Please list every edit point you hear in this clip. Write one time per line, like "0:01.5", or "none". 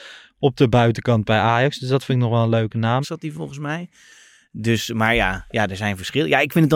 0:03.0